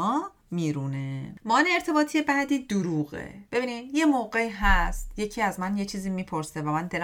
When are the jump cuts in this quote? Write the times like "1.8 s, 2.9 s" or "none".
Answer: 3.5 s